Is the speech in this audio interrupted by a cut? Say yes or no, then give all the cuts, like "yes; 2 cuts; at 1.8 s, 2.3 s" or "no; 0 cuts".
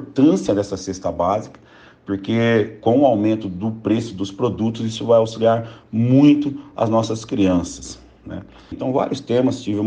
yes; 1 cut; at 8.7 s